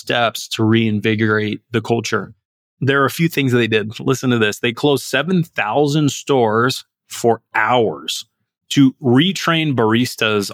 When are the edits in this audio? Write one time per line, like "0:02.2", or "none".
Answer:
none